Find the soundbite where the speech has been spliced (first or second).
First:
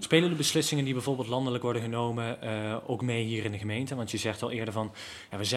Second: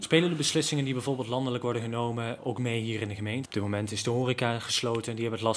second